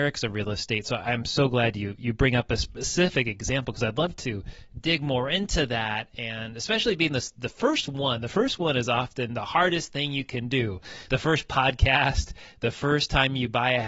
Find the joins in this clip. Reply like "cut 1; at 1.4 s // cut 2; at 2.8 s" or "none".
none